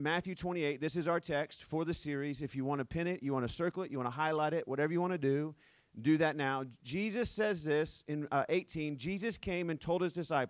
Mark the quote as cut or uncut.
uncut